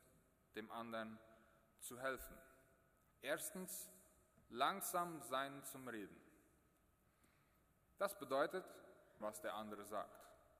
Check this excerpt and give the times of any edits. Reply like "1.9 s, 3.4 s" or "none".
3.1 s, 9.2 s